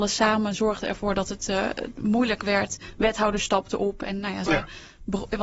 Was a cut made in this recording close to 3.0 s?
no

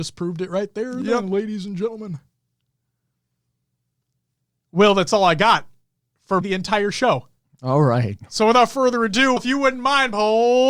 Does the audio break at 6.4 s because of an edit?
yes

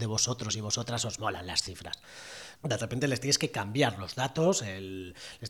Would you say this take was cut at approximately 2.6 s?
yes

